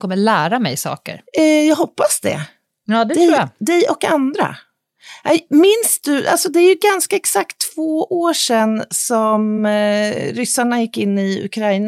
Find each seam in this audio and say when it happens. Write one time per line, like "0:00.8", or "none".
none